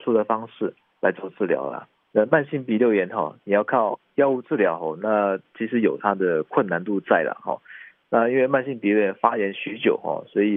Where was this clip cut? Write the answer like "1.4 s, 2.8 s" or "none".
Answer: 2.1 s